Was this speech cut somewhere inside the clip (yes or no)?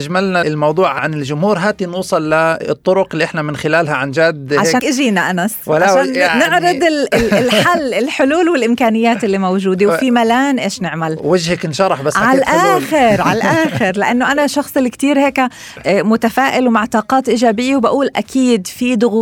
yes